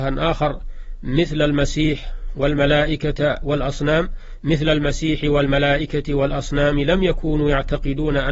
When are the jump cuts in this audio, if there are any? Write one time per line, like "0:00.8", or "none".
none